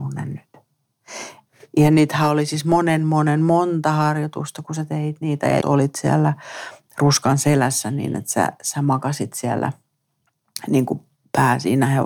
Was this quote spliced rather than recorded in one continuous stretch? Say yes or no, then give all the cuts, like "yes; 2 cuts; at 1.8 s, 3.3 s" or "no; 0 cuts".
yes; 1 cut; at 5.6 s